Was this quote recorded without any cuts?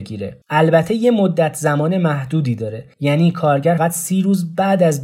no; 1 cut; at 3.8 s

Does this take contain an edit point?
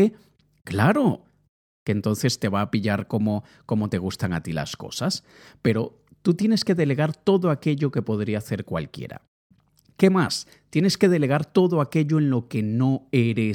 no; 0 cuts

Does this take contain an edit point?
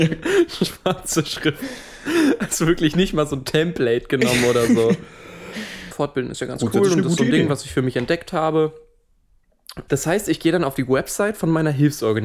yes; 2 cuts; at 5.9 s, 9.9 s

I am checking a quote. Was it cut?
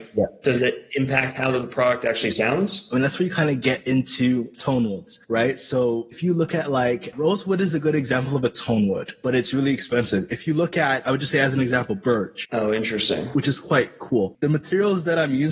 yes; 3 cuts; at 7.1 s, 12.4 s, 14.3 s

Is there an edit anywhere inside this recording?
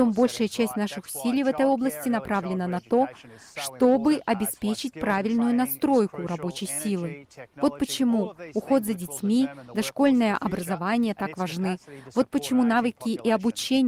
no; 0 cuts

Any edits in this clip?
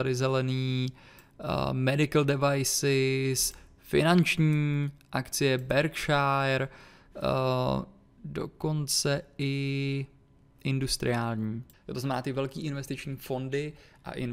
yes; 1 cut; at 11.7 s

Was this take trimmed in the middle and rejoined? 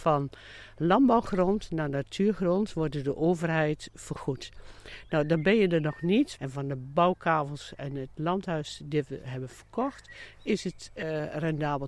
yes; 1 cut; at 6.4 s

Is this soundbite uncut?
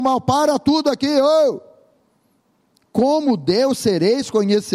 yes; 0 cuts

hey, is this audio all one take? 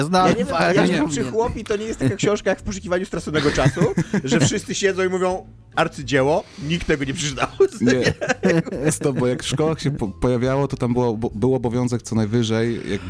yes; 0 cuts

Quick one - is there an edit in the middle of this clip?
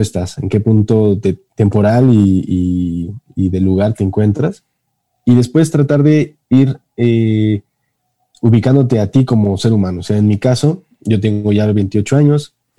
no; 0 cuts

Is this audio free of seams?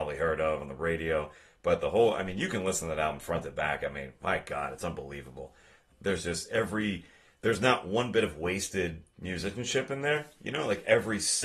yes; 0 cuts

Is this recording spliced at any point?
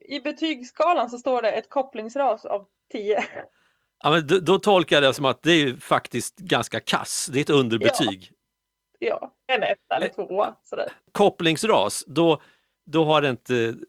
no; 0 cuts

